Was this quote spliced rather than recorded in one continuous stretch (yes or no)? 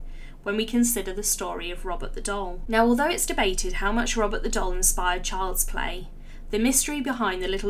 no